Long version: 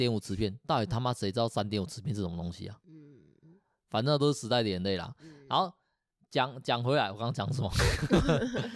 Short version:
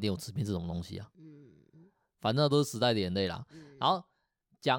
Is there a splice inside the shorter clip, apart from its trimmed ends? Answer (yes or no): no